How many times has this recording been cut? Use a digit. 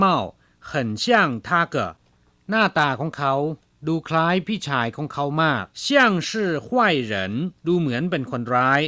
3